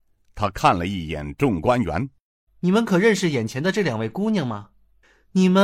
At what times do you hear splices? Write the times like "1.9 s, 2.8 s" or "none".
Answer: 2.5 s